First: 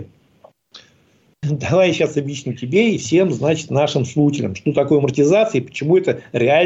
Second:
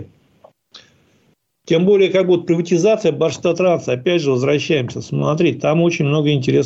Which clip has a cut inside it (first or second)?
first